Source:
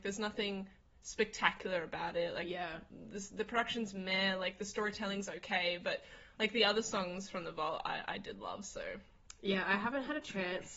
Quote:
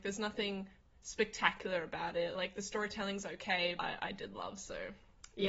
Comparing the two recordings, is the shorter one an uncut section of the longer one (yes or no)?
no